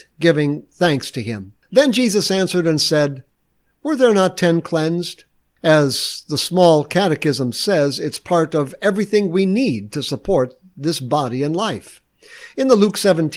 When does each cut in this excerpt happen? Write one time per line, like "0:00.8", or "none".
0:01.6
0:05.6